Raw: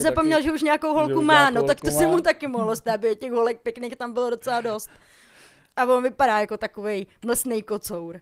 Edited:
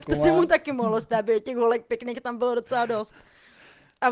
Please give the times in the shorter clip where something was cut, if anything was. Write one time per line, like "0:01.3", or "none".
none